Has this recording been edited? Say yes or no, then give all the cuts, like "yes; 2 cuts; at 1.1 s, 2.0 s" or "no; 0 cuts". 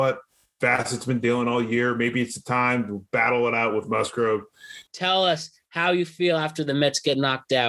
yes; 1 cut; at 4.9 s